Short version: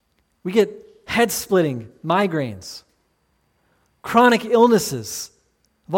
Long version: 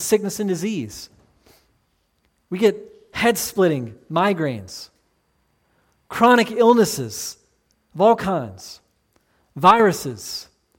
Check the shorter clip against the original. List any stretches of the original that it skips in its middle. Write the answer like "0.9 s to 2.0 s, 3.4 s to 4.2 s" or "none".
none